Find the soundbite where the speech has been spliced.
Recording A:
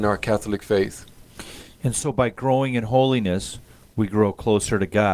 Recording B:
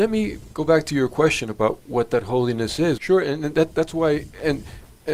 B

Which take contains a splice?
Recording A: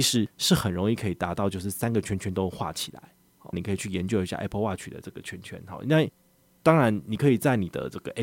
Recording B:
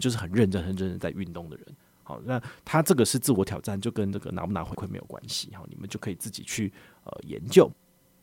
A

